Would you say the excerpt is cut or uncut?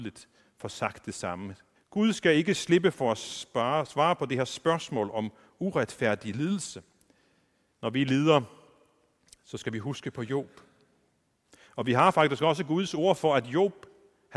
cut